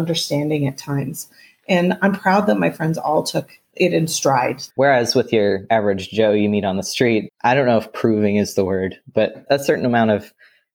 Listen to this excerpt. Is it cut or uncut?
cut